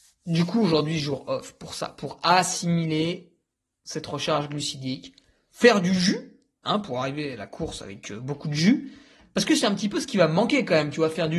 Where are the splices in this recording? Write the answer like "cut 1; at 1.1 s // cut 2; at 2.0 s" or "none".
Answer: none